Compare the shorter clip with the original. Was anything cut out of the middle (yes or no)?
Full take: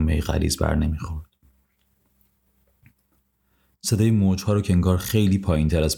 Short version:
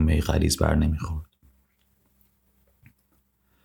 no